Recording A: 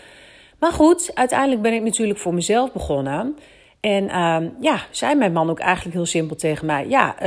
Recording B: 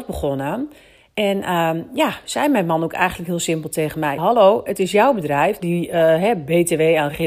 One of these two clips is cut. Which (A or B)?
B